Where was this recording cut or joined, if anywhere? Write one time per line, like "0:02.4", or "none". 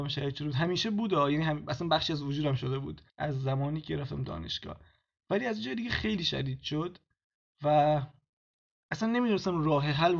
0:03.1